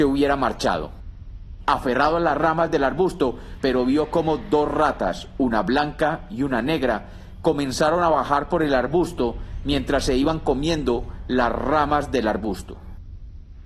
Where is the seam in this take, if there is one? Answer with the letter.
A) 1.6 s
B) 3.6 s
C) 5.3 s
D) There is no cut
B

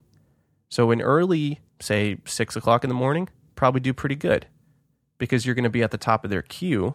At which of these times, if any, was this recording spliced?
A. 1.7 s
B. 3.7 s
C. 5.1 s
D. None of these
A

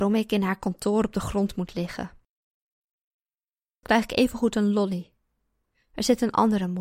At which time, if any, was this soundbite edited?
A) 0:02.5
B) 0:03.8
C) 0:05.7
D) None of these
B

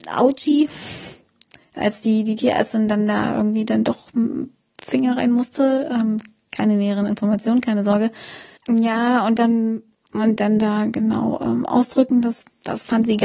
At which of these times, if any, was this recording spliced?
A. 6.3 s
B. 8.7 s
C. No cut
C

